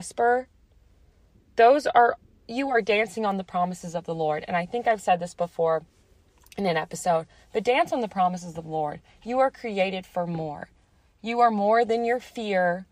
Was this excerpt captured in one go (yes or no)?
yes